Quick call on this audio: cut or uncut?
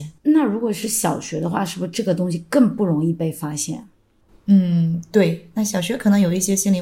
uncut